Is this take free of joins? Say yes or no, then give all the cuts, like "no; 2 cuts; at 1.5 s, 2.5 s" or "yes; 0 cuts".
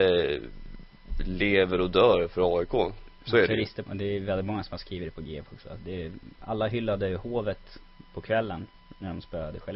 no; 1 cut; at 3.8 s